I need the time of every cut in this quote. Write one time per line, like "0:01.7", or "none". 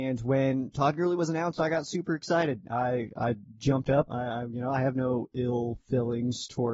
0:04.1